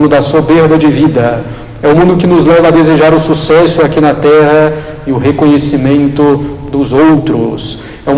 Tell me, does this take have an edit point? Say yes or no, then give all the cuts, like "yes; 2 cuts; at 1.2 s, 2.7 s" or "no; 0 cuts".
no; 0 cuts